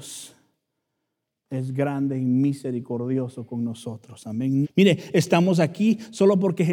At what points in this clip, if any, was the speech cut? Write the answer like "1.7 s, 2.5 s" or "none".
4.6 s